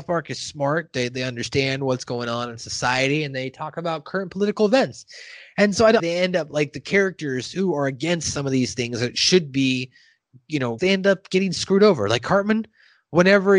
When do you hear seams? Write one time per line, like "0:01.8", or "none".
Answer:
0:06.0
0:10.8